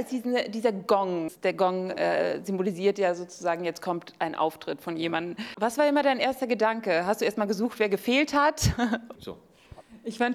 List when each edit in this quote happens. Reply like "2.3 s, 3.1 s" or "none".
9.1 s